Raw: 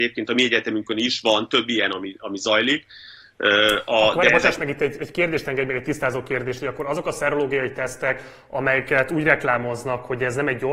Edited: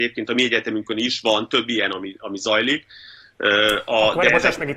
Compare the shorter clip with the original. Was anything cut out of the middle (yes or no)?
no